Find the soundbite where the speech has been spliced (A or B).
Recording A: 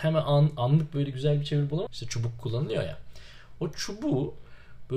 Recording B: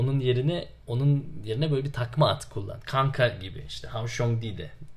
A